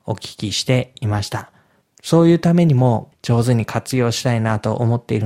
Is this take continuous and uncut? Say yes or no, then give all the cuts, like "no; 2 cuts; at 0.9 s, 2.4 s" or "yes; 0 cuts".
no; 2 cuts; at 1.8 s, 3.1 s